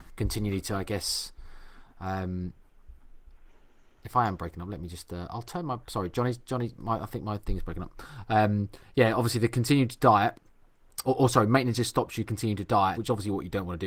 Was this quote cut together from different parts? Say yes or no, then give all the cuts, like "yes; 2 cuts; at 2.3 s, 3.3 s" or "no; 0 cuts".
yes; 2 cuts; at 11.0 s, 12.9 s